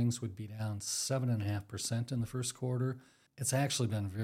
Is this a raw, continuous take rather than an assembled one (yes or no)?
no